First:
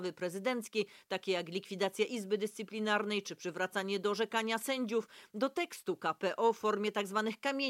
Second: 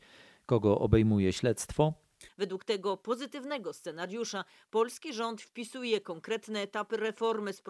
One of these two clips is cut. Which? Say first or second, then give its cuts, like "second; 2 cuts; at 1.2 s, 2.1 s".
second; 1 cut; at 2.3 s